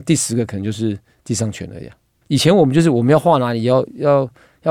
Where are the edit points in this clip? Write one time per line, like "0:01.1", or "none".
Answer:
0:02.2